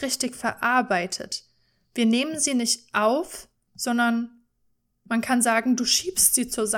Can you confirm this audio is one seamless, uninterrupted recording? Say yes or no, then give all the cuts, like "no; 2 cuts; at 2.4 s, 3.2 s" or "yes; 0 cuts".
yes; 0 cuts